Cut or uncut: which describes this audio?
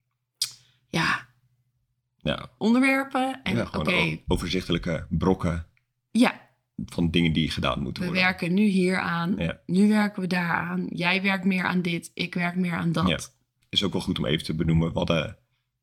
cut